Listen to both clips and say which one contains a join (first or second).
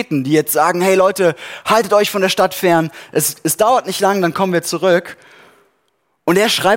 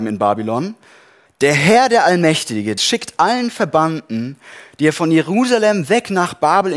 second